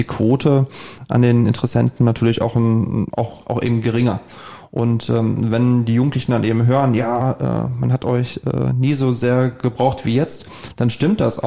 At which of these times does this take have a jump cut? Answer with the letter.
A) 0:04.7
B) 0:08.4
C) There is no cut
C